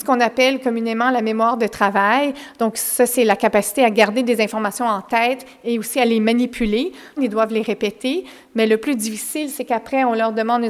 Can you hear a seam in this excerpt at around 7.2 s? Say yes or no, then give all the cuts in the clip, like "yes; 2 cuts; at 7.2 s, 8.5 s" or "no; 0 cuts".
yes; 1 cut; at 7.2 s